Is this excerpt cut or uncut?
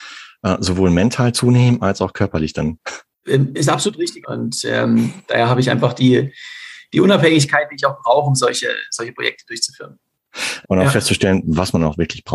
cut